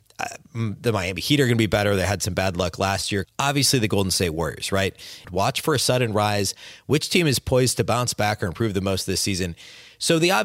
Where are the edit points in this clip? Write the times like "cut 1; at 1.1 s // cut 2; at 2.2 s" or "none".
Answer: cut 1; at 3.2 s // cut 2; at 5.2 s